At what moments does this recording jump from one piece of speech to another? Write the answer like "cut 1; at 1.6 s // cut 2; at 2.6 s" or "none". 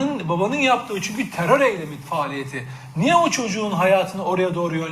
cut 1; at 2.0 s